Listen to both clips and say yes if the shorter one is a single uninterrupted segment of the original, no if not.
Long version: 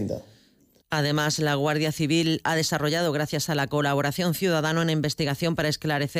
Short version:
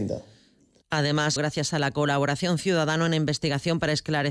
no